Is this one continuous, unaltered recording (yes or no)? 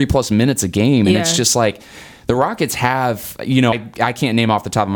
no